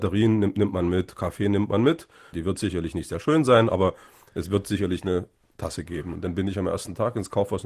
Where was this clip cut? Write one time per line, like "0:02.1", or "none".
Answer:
0:02.3